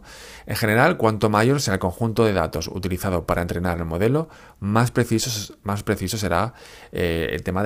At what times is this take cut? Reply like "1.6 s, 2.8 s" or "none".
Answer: none

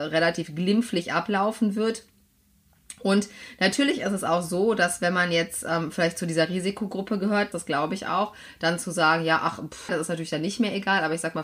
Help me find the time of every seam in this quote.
7.5 s, 9.9 s

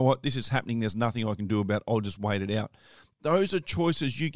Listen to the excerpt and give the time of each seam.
none

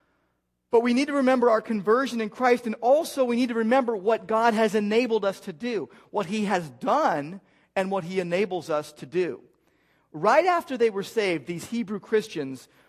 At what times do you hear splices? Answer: none

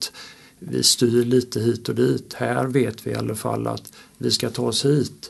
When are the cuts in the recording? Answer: none

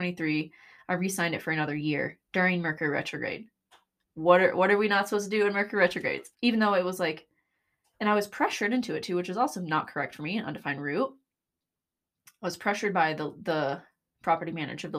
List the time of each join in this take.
6.3 s

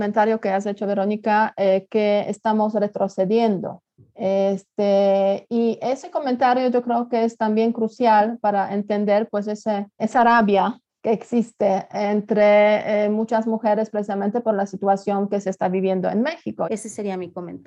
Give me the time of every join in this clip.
10.0 s, 16.6 s

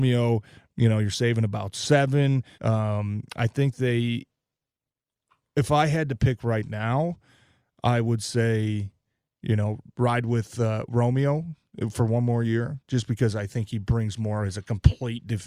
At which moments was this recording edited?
2.5 s

